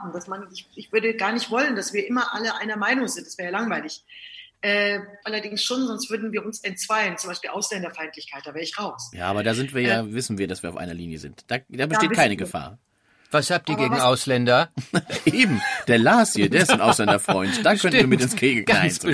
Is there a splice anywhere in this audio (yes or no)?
yes